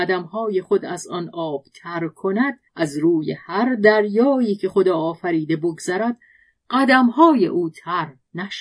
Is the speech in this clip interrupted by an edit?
yes; 1 cut; at 2.7 s

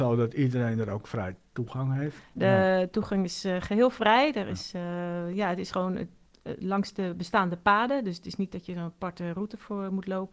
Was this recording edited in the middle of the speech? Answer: yes; 1 cut; at 2.4 s

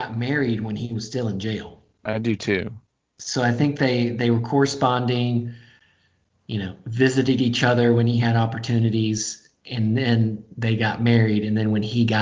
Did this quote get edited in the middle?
no; 0 cuts

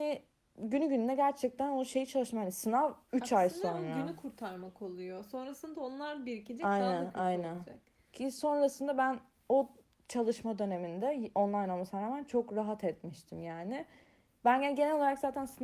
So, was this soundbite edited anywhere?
no; 0 cuts

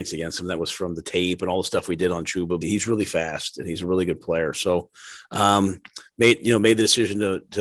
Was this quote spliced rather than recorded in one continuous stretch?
yes; 1 cut; at 2.6 s

